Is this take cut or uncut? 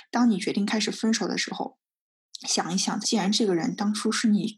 cut